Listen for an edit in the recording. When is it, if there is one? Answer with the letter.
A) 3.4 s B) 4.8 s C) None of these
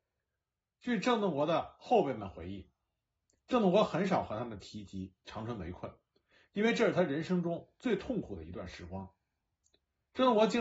C